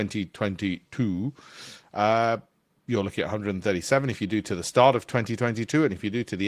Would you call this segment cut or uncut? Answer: uncut